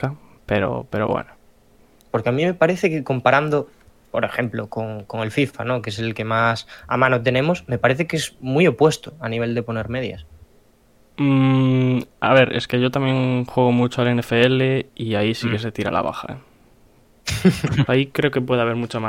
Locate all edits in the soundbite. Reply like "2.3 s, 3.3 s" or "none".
2.0 s, 17.9 s